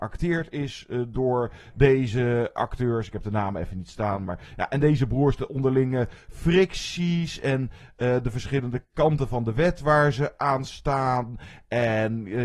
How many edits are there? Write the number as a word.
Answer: zero